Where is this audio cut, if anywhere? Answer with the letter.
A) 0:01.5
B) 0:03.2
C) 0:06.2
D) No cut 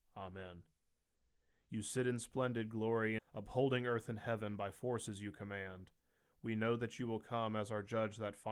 B